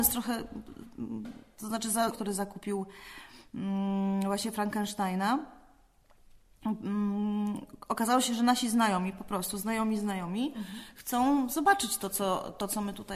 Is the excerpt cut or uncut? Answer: cut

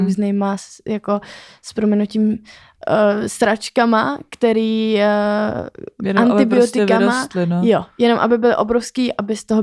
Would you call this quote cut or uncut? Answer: uncut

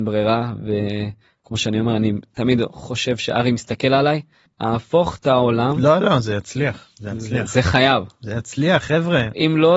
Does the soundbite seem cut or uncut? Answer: cut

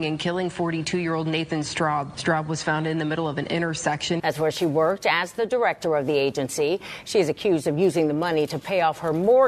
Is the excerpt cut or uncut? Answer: cut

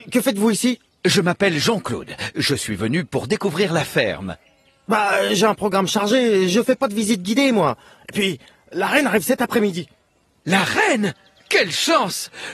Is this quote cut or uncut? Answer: uncut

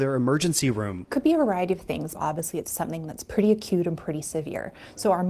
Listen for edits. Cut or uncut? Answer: cut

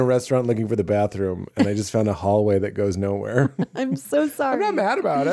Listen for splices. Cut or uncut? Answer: uncut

